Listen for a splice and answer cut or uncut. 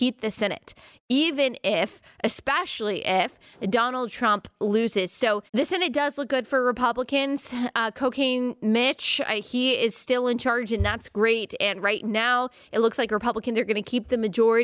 cut